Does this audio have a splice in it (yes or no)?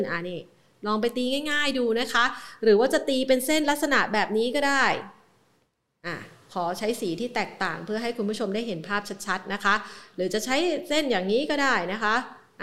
no